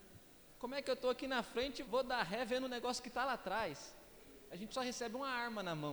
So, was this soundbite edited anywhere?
yes; 2 cuts; at 1.8 s, 4.5 s

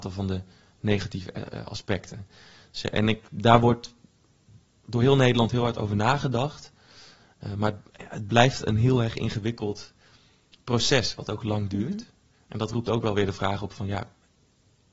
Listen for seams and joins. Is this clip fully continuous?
yes; 0 cuts

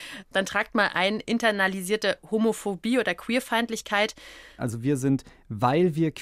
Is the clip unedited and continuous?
no; 1 cut; at 4.6 s

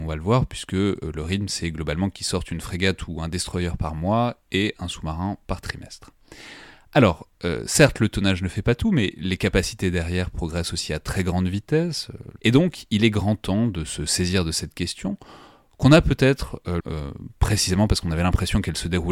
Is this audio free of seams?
no; 2 cuts; at 12.4 s, 16.8 s

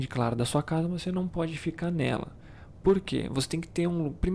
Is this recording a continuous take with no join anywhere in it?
yes; 0 cuts

